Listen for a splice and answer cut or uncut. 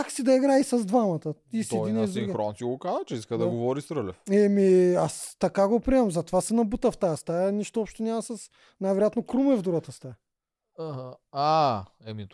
uncut